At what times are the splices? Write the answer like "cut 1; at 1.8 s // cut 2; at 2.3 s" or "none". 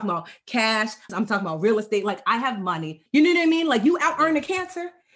cut 1; at 1.1 s // cut 2; at 3.1 s